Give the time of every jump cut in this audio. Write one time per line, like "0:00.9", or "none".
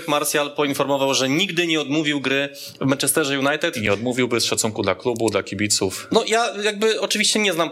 none